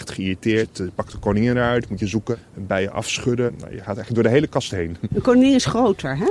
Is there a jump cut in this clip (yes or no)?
no